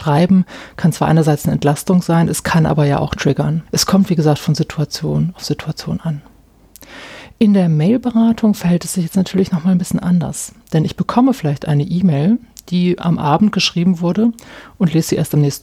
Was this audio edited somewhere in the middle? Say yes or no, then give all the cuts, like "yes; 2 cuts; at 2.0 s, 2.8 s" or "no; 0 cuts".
yes; 1 cut; at 3.7 s